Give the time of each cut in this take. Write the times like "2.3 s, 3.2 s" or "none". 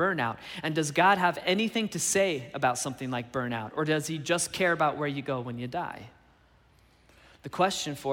none